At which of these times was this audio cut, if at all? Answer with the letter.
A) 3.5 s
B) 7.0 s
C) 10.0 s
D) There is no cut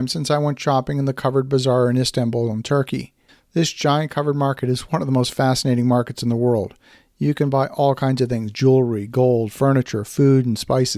D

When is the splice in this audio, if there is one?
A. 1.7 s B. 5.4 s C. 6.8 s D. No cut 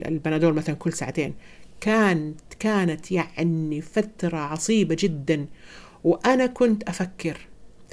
D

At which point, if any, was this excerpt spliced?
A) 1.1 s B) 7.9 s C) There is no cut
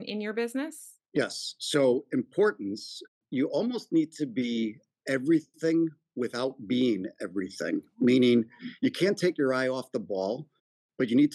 A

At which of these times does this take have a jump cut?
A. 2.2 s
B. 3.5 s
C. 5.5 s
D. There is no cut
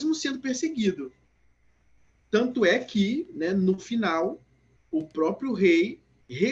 A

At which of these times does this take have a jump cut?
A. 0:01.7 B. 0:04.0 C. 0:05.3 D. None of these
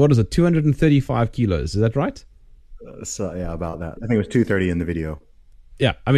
B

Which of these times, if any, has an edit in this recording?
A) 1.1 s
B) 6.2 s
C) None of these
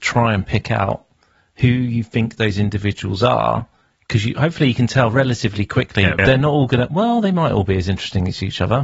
B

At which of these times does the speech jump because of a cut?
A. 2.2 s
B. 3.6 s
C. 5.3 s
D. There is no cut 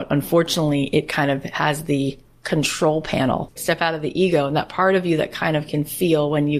B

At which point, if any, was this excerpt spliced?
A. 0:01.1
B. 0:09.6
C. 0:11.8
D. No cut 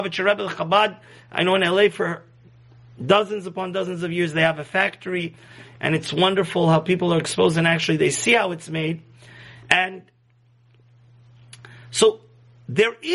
B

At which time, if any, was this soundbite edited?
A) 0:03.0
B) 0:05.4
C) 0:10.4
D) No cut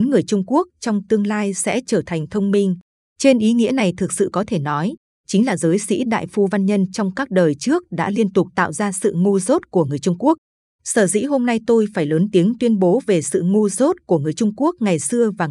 A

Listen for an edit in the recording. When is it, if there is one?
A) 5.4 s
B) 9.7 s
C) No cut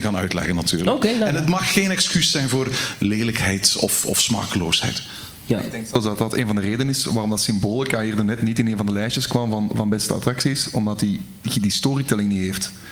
C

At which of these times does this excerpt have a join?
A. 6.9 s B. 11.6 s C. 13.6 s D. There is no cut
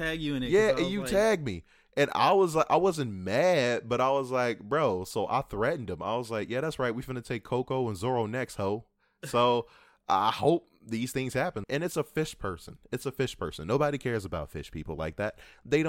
B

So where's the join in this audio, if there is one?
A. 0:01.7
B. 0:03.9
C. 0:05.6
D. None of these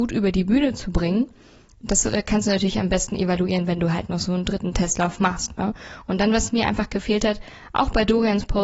D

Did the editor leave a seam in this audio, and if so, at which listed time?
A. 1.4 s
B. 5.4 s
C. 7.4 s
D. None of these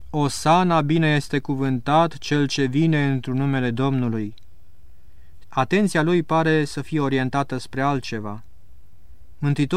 B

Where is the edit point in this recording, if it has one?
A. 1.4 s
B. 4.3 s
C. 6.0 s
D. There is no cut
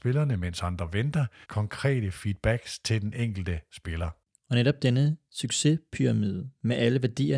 A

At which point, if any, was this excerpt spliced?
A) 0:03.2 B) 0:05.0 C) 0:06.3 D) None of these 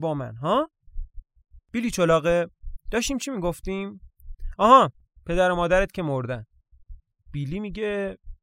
D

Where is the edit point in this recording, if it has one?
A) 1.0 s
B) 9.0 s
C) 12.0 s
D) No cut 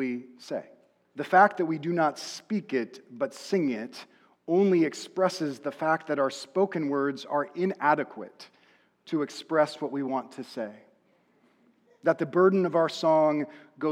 A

